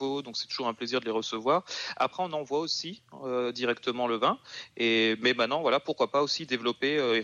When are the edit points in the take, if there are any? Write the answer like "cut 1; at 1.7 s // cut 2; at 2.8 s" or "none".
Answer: none